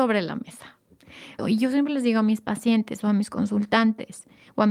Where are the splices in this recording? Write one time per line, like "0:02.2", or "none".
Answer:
0:01.4